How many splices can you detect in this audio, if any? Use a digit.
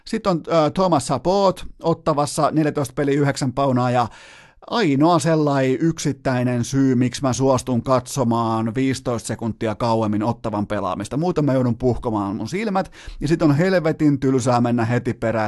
0